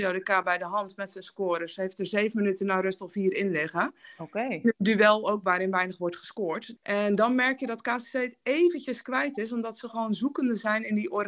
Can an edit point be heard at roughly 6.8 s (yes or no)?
yes